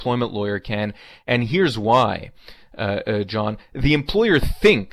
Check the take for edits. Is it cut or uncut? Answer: uncut